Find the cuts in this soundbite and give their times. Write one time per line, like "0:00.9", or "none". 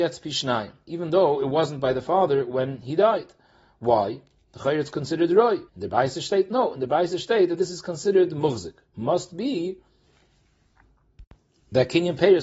0:05.7